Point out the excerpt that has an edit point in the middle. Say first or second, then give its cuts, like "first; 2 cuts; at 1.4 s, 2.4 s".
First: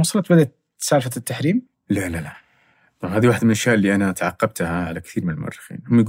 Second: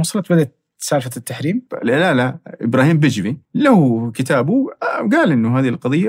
second; 2 cuts; at 1.7 s, 3.5 s